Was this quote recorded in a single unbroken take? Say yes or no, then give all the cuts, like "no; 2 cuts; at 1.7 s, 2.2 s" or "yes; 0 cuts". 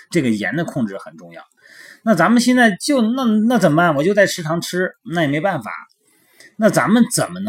yes; 0 cuts